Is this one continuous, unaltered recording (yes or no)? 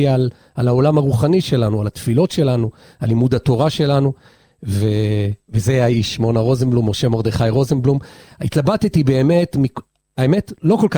yes